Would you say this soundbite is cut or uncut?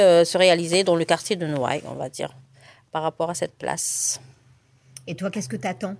uncut